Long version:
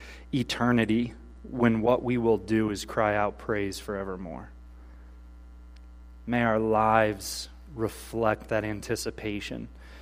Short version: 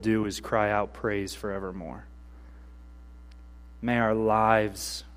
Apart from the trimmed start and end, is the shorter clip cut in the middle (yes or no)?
no